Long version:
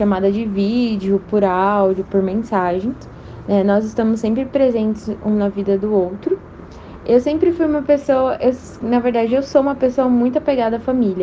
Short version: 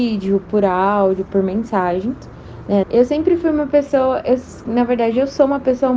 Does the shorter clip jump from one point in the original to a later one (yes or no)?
yes